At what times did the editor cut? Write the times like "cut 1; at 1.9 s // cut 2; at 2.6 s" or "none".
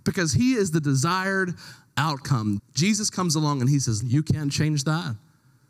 cut 1; at 2.6 s // cut 2; at 4.0 s

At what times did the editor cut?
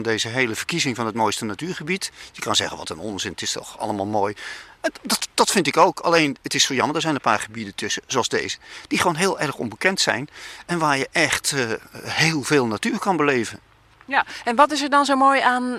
none

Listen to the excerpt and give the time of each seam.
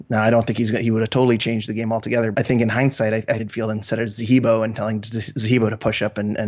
cut 1; at 2.3 s // cut 2; at 3.4 s

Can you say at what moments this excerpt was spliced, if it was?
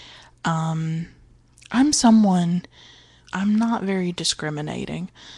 cut 1; at 3.2 s

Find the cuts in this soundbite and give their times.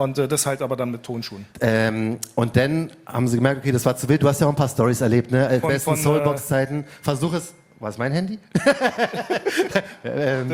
cut 1; at 1.5 s // cut 2; at 5.6 s

